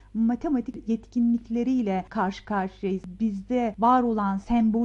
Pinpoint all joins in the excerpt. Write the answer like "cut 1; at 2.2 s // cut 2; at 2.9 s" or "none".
none